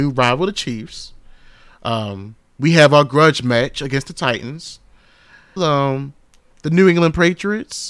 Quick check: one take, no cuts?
no; 1 cut; at 5.6 s

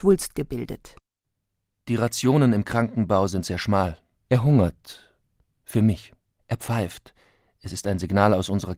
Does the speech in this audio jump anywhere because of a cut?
yes; 2 cuts; at 4.2 s, 6.4 s

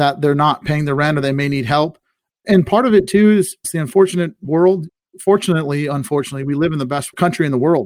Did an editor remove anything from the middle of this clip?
no; 0 cuts

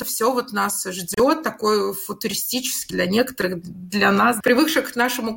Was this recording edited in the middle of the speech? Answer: yes; 2 cuts; at 2.9 s, 4.4 s

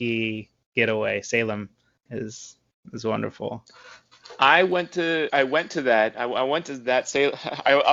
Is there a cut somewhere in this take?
yes; 1 cut; at 5.3 s

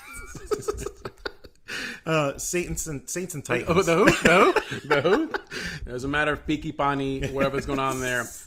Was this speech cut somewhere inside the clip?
yes; 1 cut; at 5.8 s

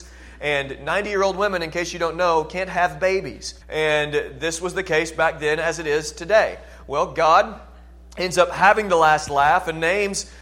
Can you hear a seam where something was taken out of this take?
yes; 1 cut; at 3.6 s

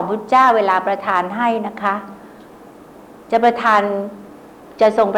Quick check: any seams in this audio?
no; 0 cuts

